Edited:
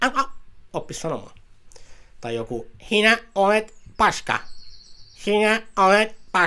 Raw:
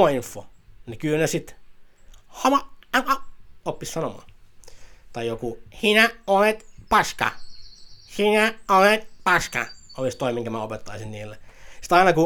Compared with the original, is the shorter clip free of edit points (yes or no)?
yes